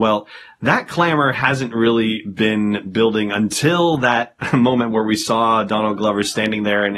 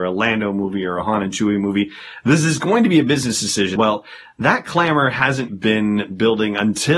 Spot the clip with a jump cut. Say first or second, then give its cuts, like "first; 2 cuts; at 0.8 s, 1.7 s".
second; 2 cuts; at 3.8 s, 5.5 s